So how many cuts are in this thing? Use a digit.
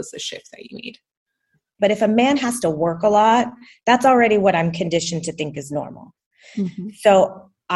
1